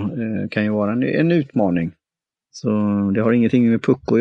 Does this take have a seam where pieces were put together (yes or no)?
yes